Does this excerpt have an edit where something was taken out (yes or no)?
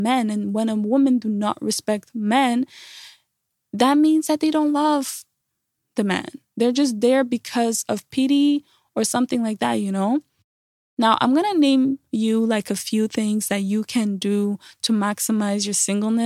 no